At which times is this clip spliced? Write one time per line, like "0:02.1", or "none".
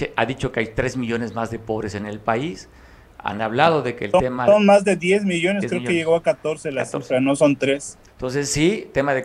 0:08.1